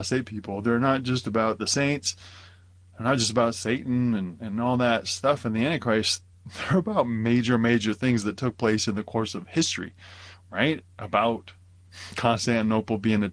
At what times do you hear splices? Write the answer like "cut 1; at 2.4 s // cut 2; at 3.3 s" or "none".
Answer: none